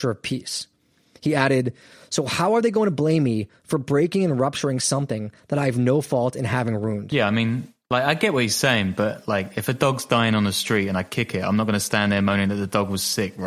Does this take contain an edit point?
no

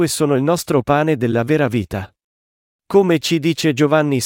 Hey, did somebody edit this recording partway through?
yes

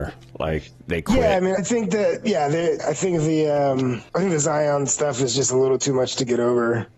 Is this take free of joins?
no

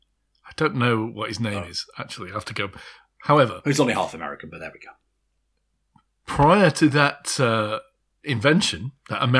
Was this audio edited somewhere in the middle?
no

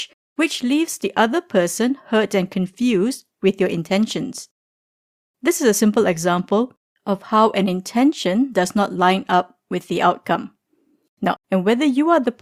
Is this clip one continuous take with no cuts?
no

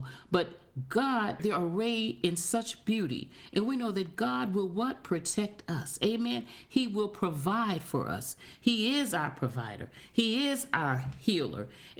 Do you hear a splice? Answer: yes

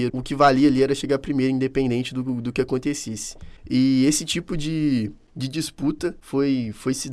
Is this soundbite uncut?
yes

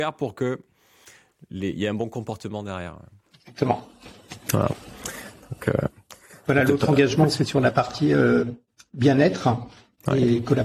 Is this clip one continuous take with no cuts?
yes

